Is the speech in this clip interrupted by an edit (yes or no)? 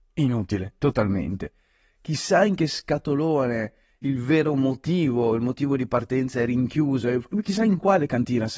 no